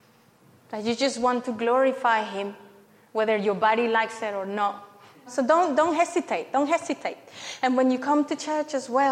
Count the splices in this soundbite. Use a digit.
1